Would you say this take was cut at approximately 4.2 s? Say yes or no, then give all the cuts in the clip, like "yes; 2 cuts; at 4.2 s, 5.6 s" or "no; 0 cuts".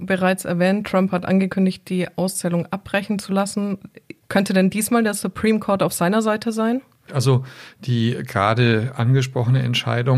no; 1 cut; at 7.1 s